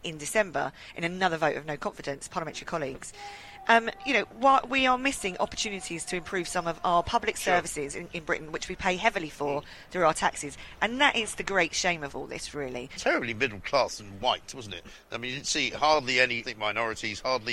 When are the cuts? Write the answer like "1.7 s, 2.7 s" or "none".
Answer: 13.0 s, 16.4 s